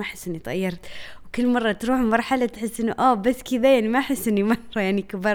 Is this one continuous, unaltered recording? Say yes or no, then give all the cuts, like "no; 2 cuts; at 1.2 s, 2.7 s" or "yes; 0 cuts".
yes; 0 cuts